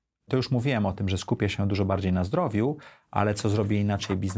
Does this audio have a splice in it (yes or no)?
no